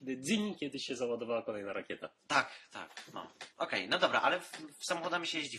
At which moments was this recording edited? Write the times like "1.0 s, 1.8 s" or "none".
3.5 s